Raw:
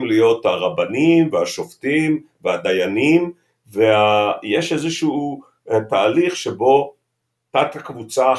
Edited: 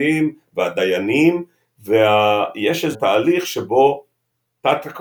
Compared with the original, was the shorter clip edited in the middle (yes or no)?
yes